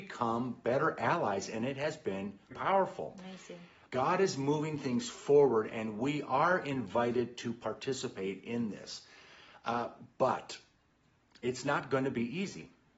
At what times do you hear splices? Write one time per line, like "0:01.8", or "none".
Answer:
0:02.5
0:03.9